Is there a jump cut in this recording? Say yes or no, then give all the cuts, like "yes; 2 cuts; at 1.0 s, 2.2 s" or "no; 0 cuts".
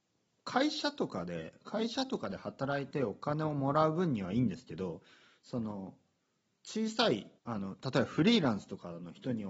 yes; 1 cut; at 7.4 s